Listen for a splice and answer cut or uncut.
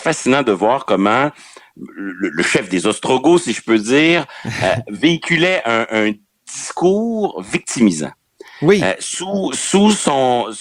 uncut